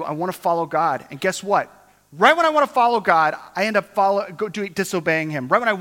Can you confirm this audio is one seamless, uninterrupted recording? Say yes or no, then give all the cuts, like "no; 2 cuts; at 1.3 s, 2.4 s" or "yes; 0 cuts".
yes; 0 cuts